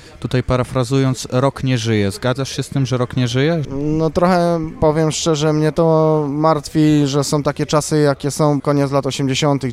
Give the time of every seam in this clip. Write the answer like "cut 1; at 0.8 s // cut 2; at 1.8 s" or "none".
cut 1; at 3.6 s // cut 2; at 8.6 s